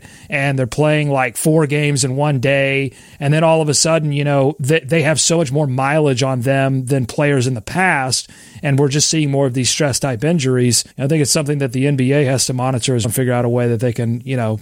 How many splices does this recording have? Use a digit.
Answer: 2